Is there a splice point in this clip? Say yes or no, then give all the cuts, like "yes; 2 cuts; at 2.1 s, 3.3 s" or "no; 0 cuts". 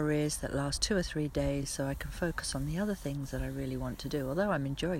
no; 0 cuts